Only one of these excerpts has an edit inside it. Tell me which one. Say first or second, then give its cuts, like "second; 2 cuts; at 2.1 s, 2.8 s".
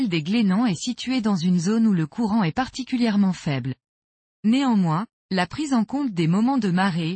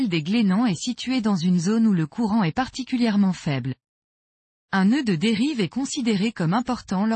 first; 1 cut; at 4.3 s